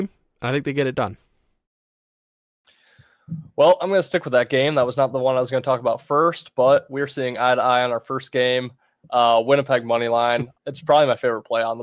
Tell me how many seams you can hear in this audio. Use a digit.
2